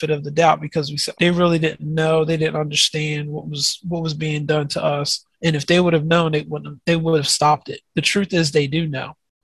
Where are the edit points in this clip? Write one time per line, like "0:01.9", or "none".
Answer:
0:01.1
0:05.3
0:07.9